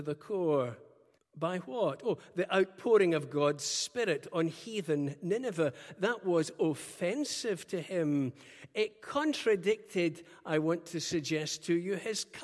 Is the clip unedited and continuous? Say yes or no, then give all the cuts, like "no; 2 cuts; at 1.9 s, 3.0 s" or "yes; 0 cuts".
no; 1 cut; at 1.2 s